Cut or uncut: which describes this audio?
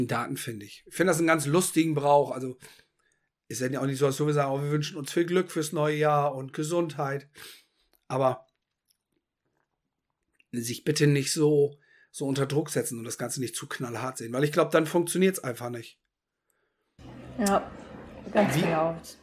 uncut